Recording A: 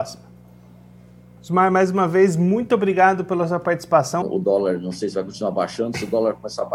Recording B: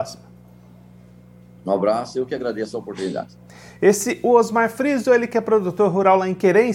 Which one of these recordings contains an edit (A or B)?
A